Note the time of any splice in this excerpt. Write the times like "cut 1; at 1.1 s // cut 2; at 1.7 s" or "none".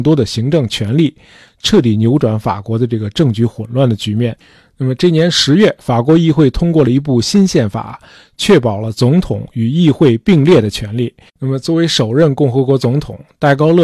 cut 1; at 11.3 s